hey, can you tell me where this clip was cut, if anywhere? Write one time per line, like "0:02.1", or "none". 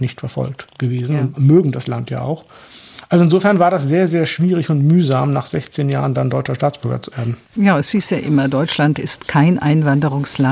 0:07.4

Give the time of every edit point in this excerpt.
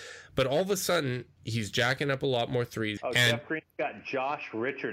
0:01.4
0:03.0

